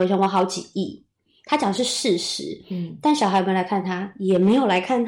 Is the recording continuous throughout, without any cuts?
yes; 0 cuts

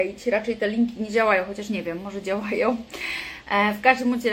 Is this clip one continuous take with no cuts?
yes; 0 cuts

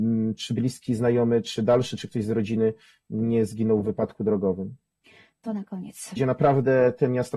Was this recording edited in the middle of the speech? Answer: yes; 1 cut; at 6.2 s

